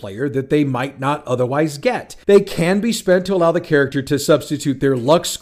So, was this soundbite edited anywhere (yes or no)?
yes